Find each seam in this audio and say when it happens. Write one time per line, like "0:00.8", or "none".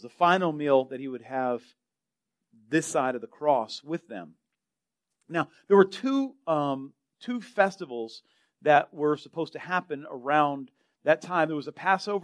none